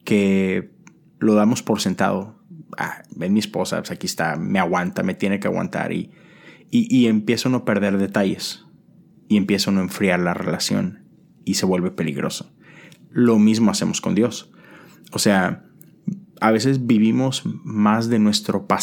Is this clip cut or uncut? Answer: uncut